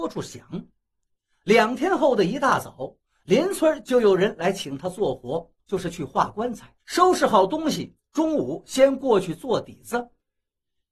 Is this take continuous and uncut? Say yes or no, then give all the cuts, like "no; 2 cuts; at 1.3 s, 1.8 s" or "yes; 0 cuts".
no; 1 cut; at 6.8 s